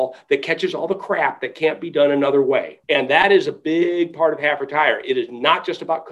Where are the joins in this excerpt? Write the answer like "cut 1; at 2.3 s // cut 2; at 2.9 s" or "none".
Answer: cut 1; at 2.8 s